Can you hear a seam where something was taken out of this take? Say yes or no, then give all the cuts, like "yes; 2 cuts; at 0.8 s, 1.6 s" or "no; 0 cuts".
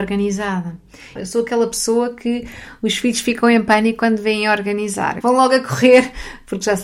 yes; 2 cuts; at 1.2 s, 5.2 s